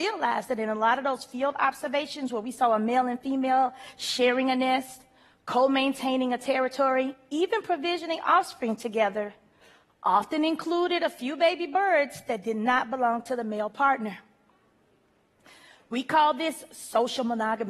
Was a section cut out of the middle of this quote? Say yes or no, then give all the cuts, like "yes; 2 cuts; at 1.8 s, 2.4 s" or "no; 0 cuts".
no; 0 cuts